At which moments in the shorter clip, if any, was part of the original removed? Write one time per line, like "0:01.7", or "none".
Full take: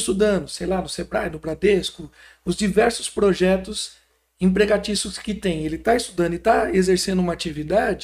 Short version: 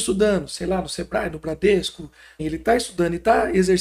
0:02.4